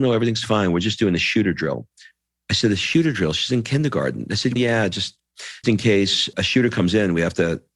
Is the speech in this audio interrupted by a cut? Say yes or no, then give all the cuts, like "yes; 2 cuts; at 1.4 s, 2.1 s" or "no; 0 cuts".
yes; 2 cuts; at 4.6 s, 5.6 s